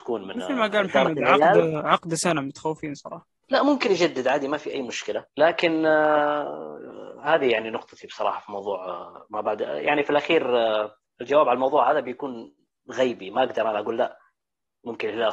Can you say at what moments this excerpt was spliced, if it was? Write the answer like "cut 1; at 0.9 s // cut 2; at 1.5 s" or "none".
cut 1; at 3.4 s // cut 2; at 5.3 s